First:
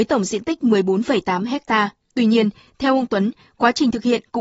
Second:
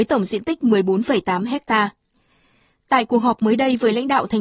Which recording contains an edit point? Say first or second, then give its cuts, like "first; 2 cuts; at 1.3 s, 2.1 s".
first; 1 cut; at 2.1 s